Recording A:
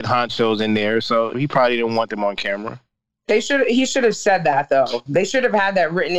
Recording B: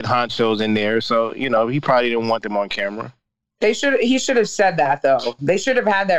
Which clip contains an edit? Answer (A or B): A